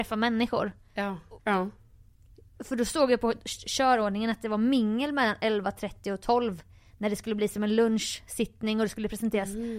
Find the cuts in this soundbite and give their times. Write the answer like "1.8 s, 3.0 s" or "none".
1.4 s